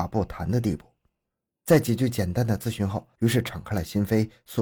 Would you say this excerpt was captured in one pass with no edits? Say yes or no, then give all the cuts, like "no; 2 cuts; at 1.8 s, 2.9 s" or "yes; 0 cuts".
no; 2 cuts; at 1.5 s, 3.1 s